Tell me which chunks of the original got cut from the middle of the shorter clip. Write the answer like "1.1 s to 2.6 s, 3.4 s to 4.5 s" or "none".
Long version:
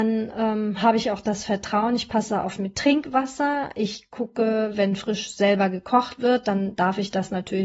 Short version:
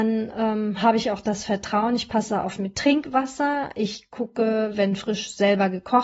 none

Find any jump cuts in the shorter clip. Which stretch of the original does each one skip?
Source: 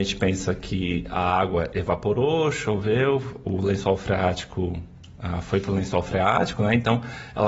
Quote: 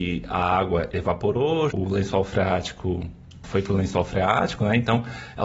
2.5 s to 3.4 s, 5.2 s to 5.4 s

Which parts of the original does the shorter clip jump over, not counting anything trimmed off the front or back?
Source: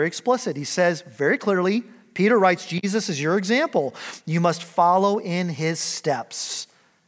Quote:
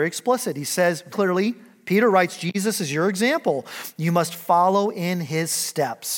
1.1 s to 1.4 s

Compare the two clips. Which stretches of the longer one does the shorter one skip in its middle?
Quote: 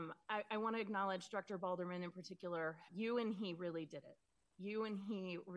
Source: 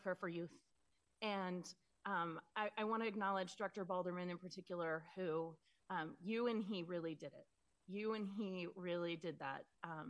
5.1 s to 6.2 s

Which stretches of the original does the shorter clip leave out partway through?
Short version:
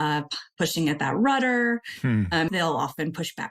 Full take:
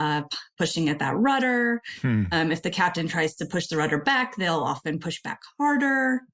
2.5 s to 4.4 s

